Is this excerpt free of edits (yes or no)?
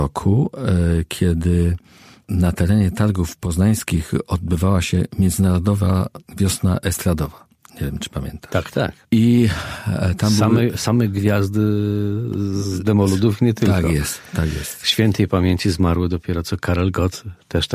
yes